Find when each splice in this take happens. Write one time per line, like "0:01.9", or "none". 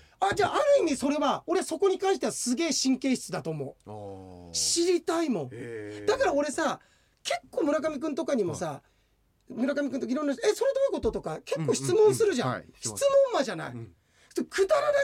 none